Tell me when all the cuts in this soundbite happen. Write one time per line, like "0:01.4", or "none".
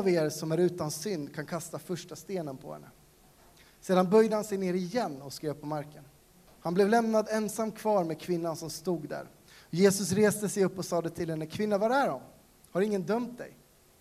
0:06.5